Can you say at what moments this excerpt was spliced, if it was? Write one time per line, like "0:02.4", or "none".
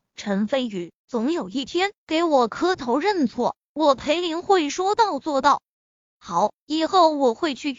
0:02.0